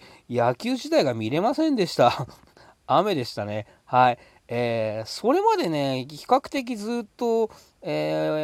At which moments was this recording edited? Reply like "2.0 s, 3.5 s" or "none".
none

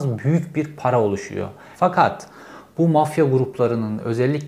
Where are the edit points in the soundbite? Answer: 1.7 s

